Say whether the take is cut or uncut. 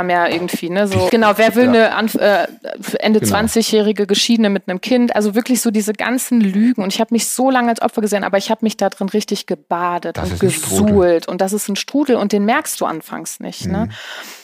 cut